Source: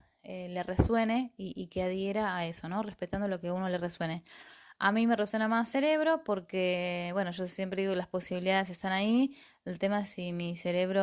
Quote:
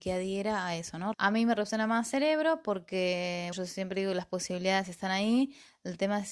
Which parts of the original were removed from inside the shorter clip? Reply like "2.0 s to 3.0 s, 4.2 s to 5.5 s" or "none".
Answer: 2.8 s to 4.7 s, 7.1 s to 7.3 s